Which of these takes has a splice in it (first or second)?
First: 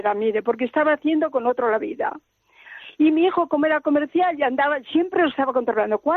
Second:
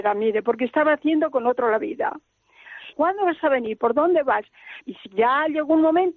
second